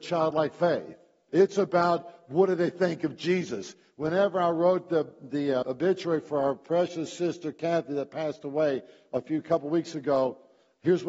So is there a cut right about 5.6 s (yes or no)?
yes